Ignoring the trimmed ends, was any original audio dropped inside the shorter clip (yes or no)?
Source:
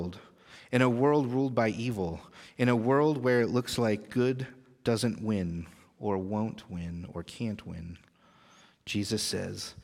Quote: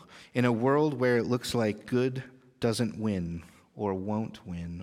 no